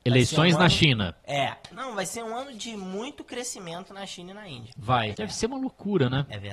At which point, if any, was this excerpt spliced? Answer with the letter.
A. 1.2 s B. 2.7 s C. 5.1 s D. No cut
C